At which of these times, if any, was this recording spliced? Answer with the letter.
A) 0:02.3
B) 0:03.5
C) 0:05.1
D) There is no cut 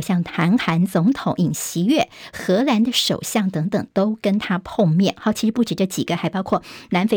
D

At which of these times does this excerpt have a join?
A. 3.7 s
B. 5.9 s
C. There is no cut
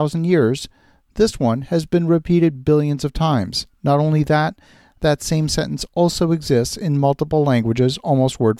C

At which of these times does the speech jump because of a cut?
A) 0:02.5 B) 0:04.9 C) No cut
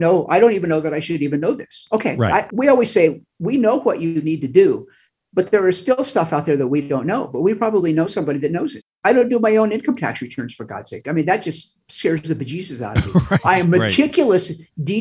A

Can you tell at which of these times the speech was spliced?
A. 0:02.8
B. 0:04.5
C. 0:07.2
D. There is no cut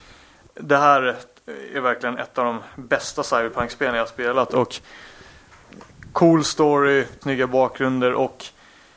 C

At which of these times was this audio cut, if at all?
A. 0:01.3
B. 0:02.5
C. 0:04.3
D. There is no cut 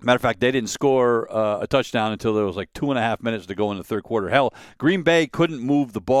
D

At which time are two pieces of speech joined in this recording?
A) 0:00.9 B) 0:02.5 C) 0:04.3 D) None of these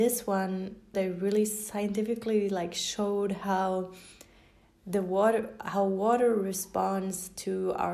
A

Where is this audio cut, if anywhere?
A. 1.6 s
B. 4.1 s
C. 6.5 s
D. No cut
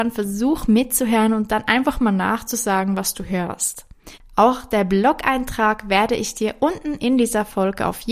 B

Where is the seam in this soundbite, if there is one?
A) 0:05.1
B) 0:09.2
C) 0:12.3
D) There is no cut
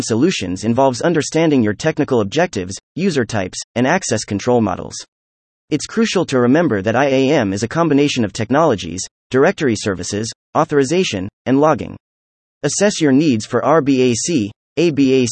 B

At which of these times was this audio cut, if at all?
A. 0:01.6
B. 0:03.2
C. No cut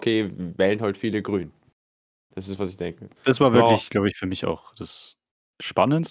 B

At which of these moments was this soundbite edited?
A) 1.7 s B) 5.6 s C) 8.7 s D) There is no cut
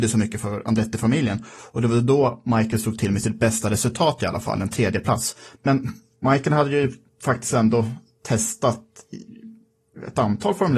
B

